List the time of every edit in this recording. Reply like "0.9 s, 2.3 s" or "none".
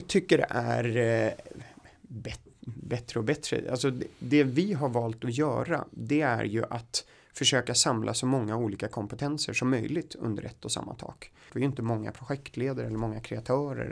11.5 s